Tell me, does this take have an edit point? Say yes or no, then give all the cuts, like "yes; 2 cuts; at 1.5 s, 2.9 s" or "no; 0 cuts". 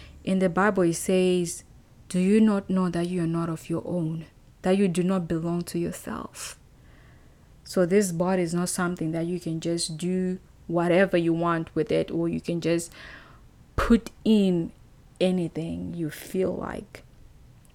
no; 0 cuts